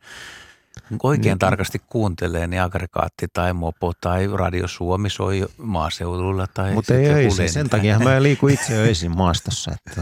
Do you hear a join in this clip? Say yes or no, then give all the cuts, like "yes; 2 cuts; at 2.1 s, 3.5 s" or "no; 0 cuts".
no; 0 cuts